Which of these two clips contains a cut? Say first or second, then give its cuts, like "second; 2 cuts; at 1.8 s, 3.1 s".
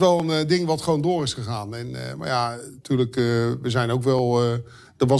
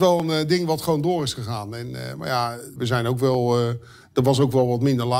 second; 1 cut; at 2.8 s